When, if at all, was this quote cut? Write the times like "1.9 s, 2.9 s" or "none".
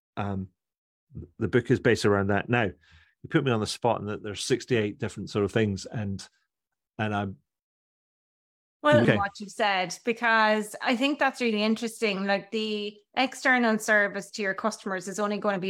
9.0 s